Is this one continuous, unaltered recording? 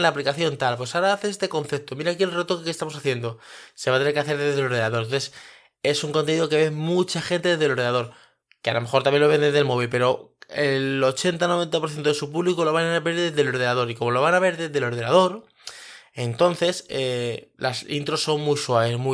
yes; 0 cuts

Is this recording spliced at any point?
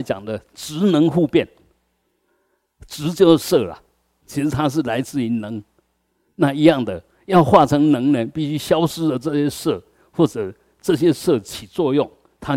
no; 0 cuts

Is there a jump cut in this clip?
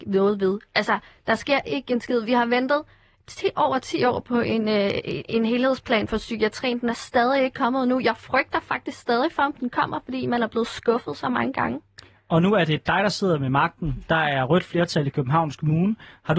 no; 0 cuts

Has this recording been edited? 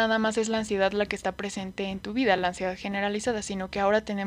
no; 0 cuts

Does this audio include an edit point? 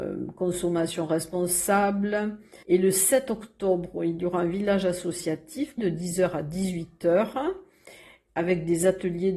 yes; 2 cuts; at 2.6 s, 5.8 s

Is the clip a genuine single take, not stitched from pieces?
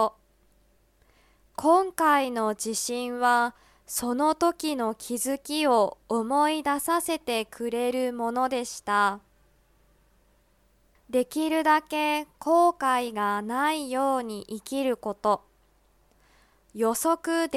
no; 1 cut; at 11.0 s

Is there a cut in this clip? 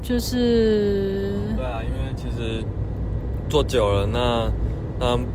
no; 0 cuts

